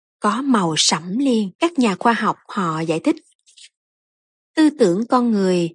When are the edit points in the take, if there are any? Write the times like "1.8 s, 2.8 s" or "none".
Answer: 1.5 s